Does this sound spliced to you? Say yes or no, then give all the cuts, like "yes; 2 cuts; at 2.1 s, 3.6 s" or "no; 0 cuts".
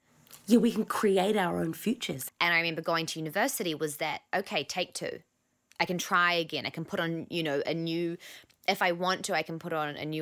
yes; 1 cut; at 2.3 s